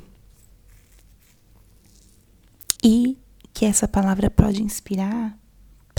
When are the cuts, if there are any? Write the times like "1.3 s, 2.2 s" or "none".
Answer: 2.8 s